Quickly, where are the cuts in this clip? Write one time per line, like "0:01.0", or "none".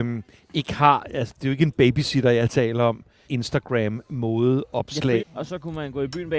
0:03.3
0:05.2

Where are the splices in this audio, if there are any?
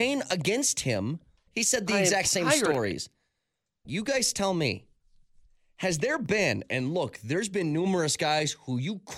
0:01.5
0:03.8

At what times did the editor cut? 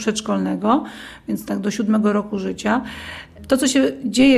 none

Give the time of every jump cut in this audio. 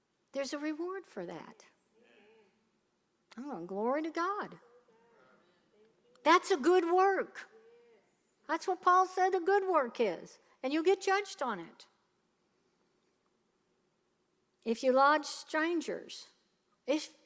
none

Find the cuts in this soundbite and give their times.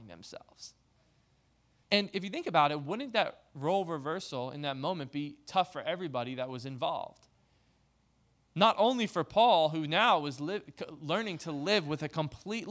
0:01.8

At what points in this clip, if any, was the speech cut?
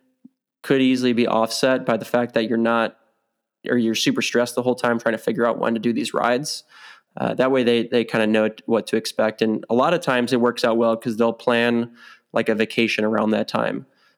0:07.1

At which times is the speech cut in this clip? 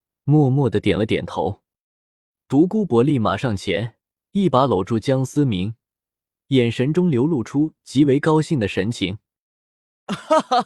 none

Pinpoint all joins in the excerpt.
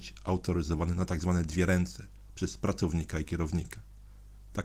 none

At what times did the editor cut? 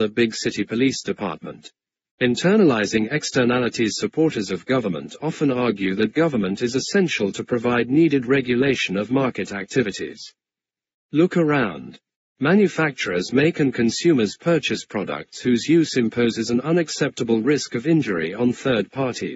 0:02.1
0:10.9
0:12.3

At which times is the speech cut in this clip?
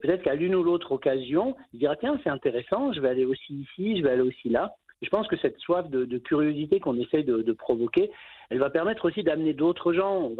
none

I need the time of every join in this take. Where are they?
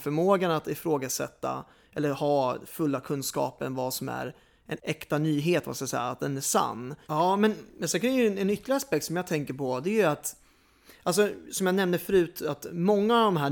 0:04.8
0:07.1

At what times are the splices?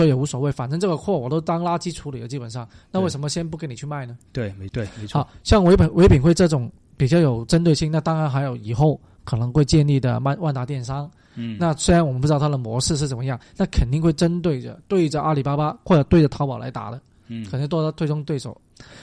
0:04.7

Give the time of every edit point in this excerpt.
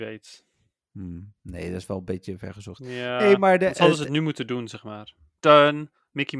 0:05.4

